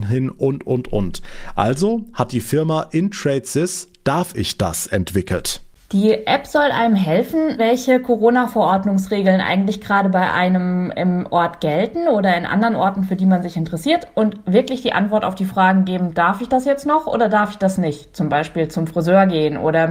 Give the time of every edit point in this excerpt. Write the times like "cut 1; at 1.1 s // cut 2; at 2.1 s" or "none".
cut 1; at 7.6 s